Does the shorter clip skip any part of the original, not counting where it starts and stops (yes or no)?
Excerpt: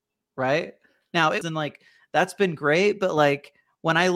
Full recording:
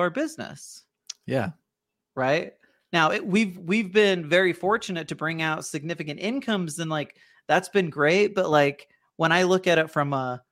yes